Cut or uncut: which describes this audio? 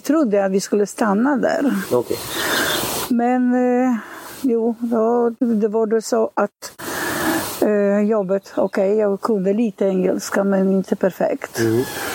uncut